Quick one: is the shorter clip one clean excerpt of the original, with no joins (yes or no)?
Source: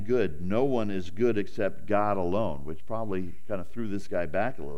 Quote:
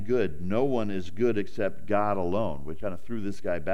no